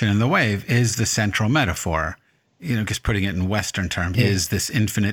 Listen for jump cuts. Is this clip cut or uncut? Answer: cut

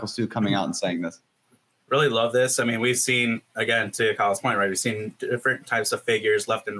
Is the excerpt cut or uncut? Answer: uncut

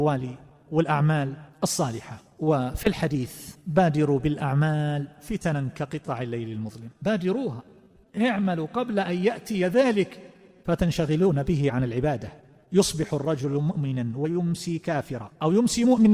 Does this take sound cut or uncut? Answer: uncut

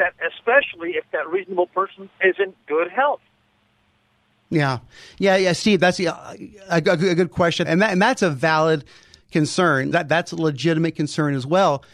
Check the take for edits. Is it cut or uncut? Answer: cut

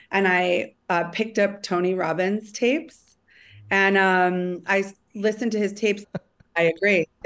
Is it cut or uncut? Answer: cut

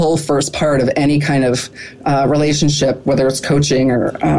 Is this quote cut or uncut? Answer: uncut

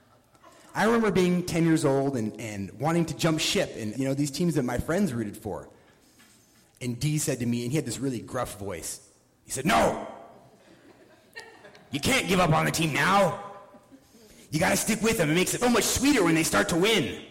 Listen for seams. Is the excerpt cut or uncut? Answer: cut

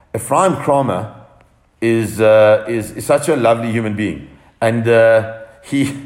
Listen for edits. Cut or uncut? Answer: uncut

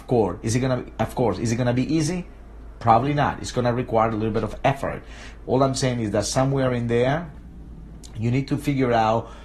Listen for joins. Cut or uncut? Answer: cut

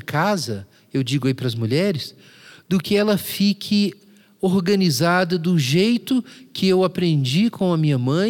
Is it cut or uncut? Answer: uncut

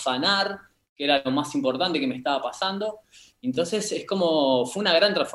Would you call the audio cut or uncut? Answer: uncut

